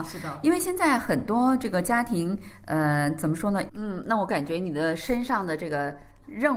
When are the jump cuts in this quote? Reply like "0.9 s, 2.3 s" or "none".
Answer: 3.7 s